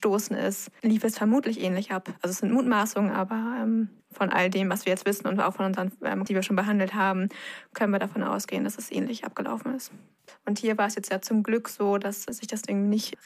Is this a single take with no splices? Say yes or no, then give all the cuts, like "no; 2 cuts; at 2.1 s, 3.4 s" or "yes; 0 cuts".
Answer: no; 3 cuts; at 4.0 s, 6.3 s, 10.3 s